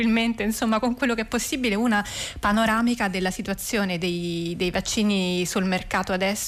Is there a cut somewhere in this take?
no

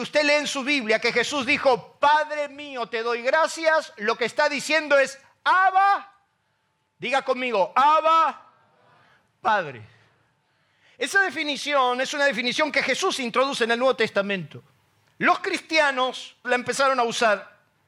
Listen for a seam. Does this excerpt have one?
yes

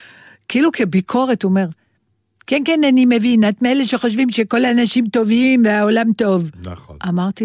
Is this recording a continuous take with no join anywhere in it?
yes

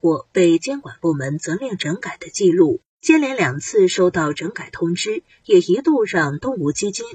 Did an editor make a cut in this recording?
yes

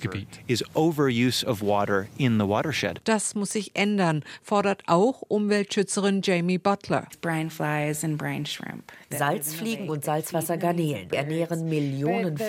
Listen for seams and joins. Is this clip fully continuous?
yes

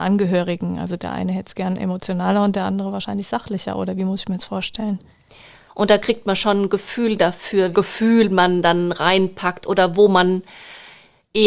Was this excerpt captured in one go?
no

